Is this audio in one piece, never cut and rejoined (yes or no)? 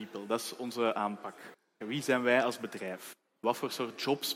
no